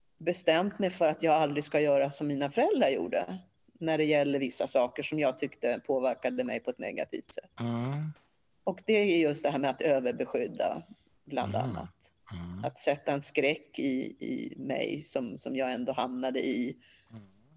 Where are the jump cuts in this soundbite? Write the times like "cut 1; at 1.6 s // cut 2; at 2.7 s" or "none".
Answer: none